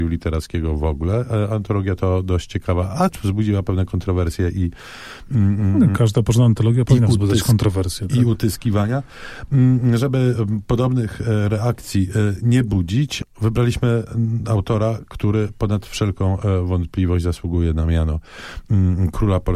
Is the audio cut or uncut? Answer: uncut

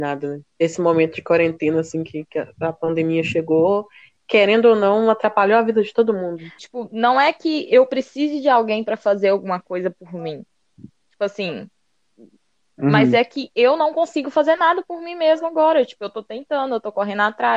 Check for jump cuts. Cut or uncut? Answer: cut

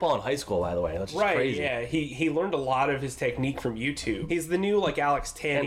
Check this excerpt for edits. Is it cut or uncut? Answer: cut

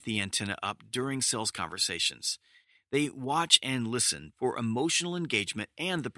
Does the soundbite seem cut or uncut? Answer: cut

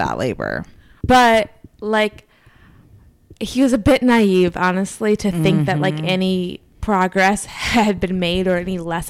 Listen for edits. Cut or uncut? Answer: cut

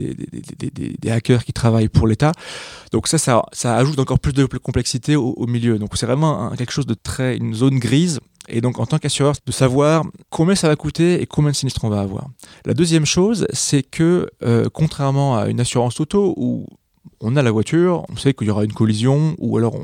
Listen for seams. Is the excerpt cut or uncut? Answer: cut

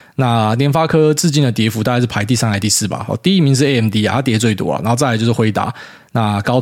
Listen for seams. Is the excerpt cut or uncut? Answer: uncut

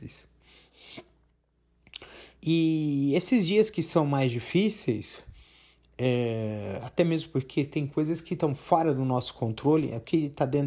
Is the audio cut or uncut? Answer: uncut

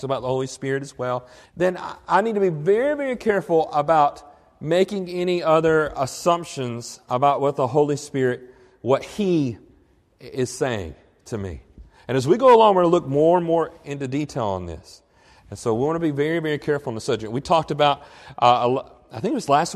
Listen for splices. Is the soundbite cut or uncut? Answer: cut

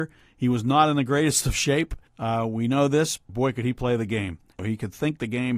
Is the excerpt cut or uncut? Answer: cut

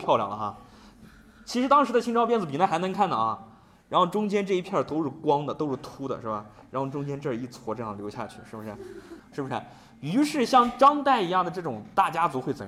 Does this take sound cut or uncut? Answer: cut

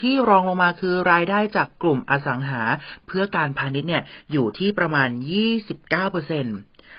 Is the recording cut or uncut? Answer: uncut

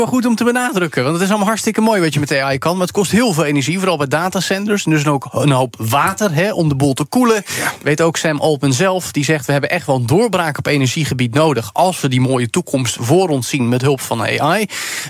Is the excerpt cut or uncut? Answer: uncut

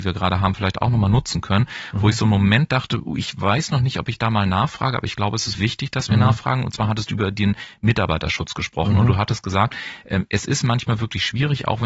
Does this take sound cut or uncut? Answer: cut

